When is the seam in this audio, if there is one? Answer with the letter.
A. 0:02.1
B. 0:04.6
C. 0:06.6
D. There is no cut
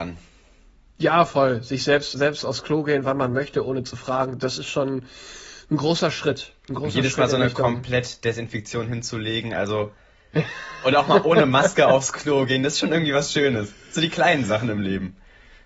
A